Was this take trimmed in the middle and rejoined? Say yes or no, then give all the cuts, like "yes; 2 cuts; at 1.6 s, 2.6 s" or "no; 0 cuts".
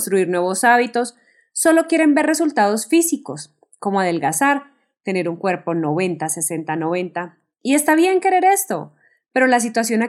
no; 0 cuts